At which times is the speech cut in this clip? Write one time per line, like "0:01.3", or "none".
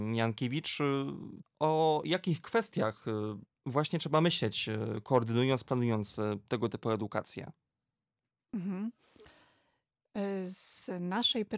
0:01.4